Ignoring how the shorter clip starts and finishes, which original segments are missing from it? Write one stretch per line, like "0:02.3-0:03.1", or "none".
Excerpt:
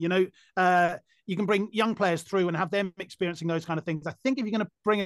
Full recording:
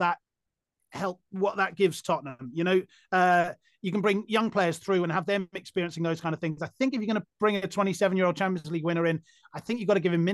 none